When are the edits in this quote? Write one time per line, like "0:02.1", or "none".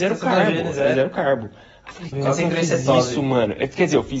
0:02.1